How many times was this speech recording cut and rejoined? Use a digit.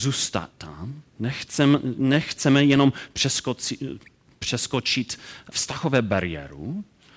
1